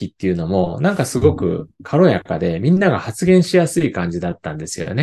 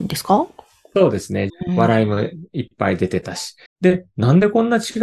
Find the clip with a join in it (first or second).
second